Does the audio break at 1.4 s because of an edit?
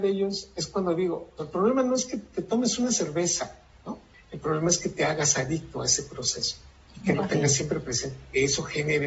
yes; 1 cut; at 1.4 s

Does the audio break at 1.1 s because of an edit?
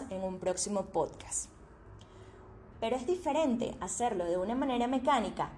no; 1 cut; at 2.7 s

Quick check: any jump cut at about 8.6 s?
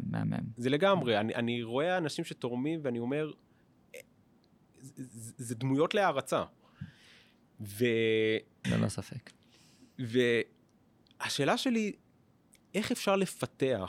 yes; 1 cut; at 8.6 s

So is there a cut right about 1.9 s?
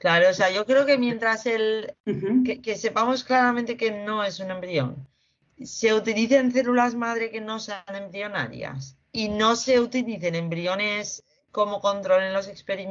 yes; 2 cuts; at 1.9 s, 9.0 s

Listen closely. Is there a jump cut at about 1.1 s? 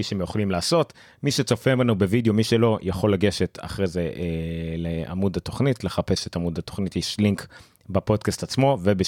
no; 0 cuts

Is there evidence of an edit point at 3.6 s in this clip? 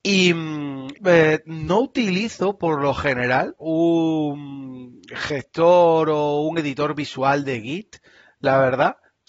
yes; 2 cuts; at 1.0 s, 3.6 s

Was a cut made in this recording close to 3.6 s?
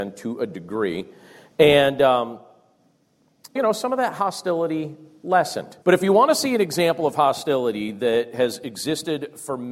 yes; 2 cuts; at 3.6 s, 5.8 s

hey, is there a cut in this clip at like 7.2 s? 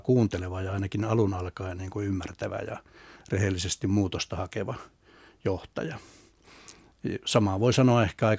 no; 0 cuts

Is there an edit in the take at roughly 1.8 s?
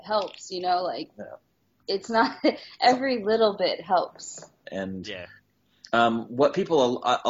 no; 1 cut; at 4.6 s

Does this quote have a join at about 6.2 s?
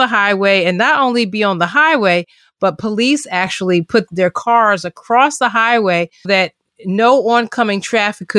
yes; 1 cut; at 6.2 s

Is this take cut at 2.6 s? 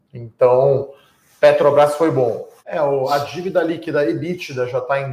yes; 1 cut; at 2.6 s

